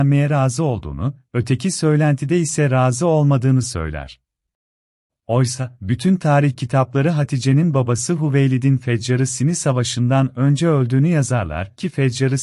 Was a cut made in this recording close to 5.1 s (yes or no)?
yes